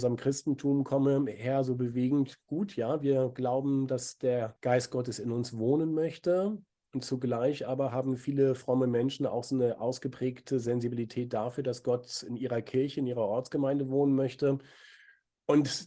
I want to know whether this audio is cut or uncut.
uncut